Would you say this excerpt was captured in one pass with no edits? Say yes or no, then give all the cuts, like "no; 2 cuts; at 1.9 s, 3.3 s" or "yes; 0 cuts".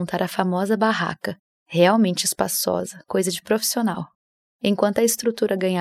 yes; 0 cuts